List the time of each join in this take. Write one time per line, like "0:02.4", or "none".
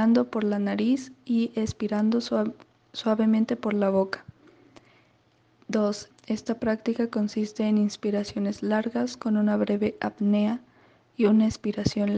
0:06.1